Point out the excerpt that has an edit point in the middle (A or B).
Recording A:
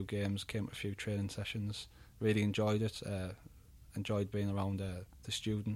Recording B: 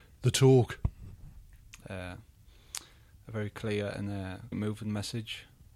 B